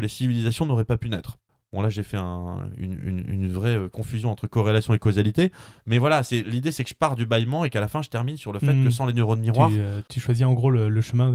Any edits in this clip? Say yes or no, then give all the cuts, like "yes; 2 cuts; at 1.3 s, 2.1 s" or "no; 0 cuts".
no; 0 cuts